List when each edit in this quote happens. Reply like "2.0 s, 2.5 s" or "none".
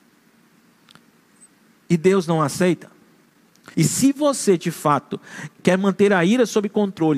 3.7 s, 5.6 s